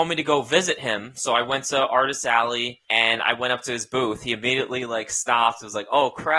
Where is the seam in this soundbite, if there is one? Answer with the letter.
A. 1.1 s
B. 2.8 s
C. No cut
B